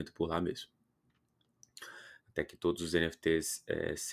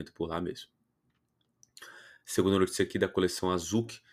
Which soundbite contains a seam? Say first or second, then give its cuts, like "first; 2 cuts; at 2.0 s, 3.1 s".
first; 1 cut; at 2.2 s